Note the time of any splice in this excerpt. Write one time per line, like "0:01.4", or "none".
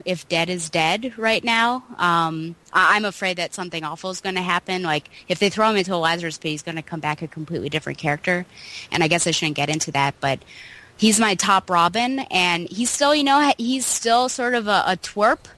none